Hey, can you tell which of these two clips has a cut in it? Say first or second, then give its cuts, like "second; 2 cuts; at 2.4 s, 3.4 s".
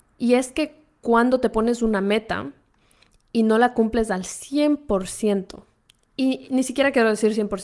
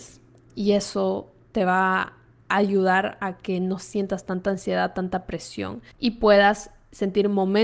second; 1 cut; at 5.9 s